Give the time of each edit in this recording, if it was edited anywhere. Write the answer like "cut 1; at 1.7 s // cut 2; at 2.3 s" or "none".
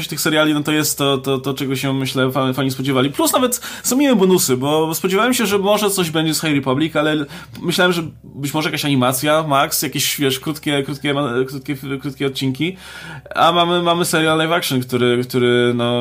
none